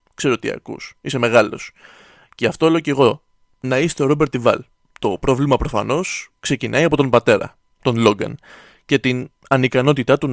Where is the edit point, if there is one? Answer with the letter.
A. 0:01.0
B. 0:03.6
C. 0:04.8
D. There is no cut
C